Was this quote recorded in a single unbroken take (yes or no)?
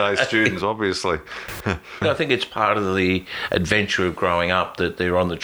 no